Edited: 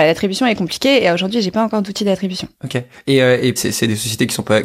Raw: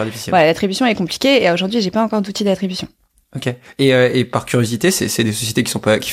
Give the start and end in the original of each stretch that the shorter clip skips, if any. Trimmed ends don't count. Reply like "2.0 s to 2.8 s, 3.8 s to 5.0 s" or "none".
2.9 s to 3.3 s, 4.3 s to 4.9 s